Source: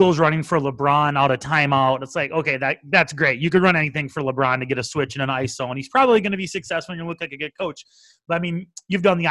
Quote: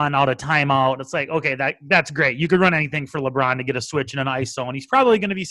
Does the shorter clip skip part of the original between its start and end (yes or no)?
no